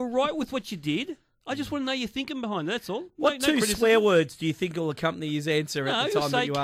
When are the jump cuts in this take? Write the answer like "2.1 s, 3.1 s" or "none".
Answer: none

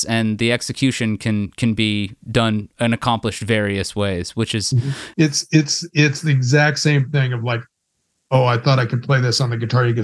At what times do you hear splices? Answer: 5.1 s

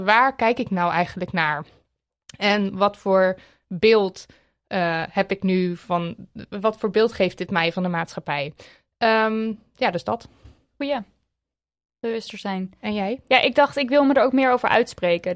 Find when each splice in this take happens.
none

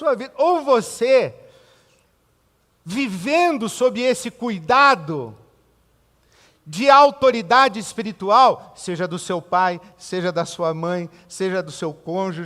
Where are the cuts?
none

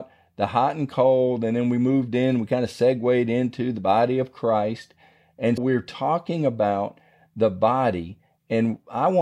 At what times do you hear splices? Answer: 5.6 s

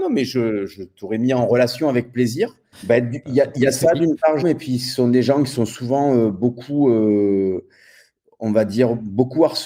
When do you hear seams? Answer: 2.7 s, 4.4 s

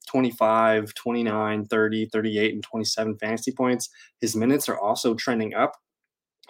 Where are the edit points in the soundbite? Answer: none

